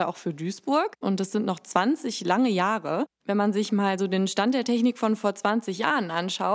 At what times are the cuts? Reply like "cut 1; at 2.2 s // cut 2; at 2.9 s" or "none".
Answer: cut 1; at 1.0 s